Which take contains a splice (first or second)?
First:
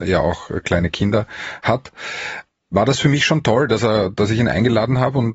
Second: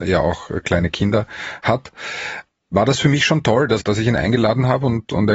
second